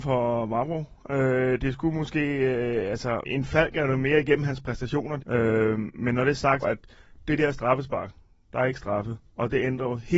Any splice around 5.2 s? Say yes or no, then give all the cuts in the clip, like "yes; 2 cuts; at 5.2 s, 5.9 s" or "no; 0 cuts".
yes; 3 cuts; at 3.2 s, 5.2 s, 6.6 s